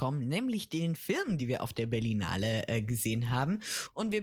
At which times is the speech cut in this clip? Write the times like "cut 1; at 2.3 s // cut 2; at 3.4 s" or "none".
none